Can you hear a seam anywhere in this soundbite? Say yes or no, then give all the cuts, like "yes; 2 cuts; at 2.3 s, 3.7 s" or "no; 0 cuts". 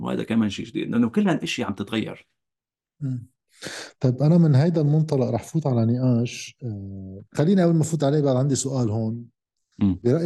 yes; 1 cut; at 7.3 s